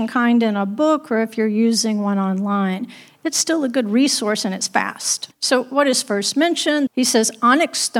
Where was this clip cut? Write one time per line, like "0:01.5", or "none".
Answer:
0:06.9